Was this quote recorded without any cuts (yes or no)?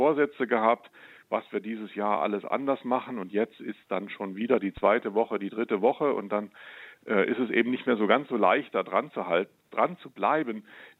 yes